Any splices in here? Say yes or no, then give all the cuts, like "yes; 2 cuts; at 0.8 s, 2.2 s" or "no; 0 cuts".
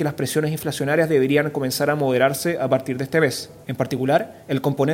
yes; 1 cut; at 3.6 s